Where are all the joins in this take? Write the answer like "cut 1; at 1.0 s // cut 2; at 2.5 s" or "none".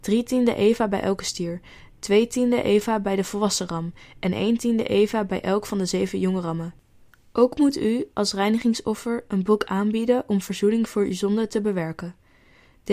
none

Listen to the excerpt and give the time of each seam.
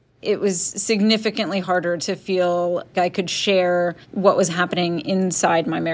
cut 1; at 2.9 s // cut 2; at 4.0 s

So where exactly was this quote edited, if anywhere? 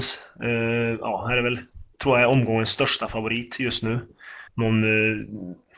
cut 1; at 1.9 s // cut 2; at 4.5 s

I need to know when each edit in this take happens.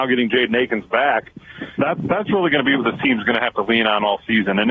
cut 1; at 1.8 s

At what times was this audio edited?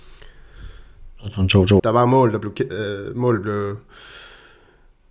cut 1; at 1.8 s

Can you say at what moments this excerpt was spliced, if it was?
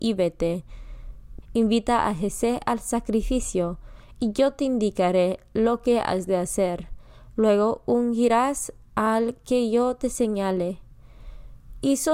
cut 1; at 1.4 s

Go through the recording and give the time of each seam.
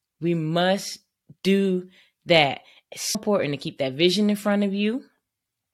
cut 1; at 3.1 s

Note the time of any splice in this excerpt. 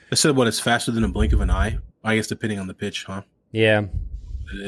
cut 1; at 1.9 s

